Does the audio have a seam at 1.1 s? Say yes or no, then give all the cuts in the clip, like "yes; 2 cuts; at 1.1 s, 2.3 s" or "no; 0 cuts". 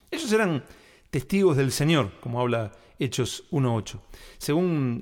no; 0 cuts